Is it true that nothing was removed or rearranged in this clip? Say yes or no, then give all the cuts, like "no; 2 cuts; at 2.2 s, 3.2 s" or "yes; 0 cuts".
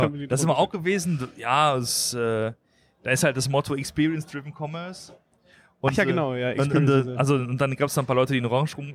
yes; 0 cuts